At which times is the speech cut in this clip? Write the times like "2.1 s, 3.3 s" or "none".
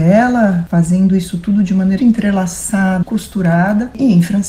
2.0 s, 3.0 s